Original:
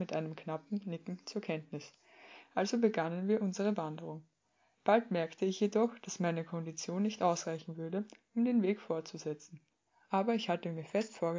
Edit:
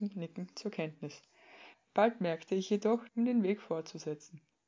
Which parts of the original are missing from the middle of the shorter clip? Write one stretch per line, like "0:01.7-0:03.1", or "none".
0:02.4-0:04.6
0:06.0-0:08.3